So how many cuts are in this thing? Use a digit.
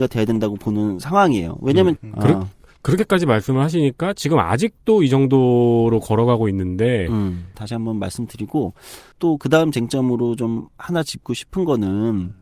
3